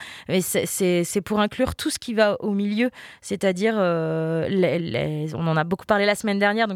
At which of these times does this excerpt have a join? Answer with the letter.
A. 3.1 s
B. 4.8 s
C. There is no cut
B